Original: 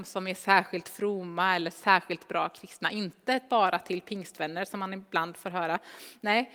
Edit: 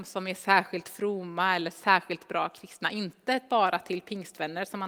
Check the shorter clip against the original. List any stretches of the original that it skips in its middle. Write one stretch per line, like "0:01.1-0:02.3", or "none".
none